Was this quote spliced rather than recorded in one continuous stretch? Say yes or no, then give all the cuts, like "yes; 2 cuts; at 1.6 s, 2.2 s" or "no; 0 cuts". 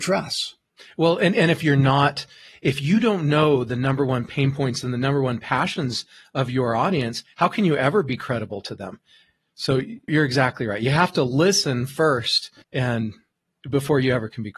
yes; 2 cuts; at 10.1 s, 12.6 s